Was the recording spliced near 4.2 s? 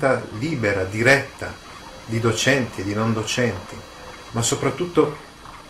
yes; 1 cut; at 4.2 s

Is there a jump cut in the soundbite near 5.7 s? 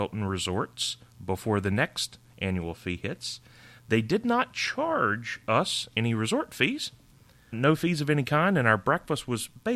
no; 2 cuts; at 3.8 s, 7.5 s

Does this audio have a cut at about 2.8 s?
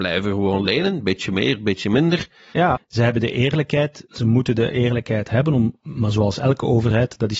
yes; 1 cut; at 2.8 s

